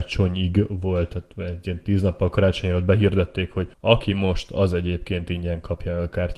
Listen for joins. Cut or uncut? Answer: cut